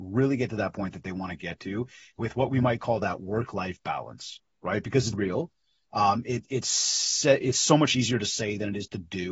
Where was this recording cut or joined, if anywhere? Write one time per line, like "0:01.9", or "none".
0:05.1